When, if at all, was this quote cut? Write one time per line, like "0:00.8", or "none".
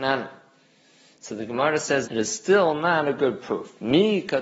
0:02.1